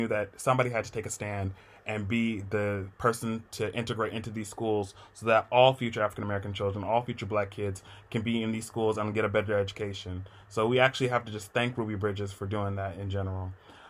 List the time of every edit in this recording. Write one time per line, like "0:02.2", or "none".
none